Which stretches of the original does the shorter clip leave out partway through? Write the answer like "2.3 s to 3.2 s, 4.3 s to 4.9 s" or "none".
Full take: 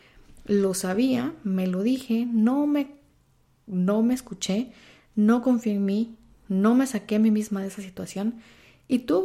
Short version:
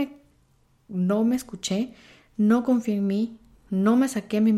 none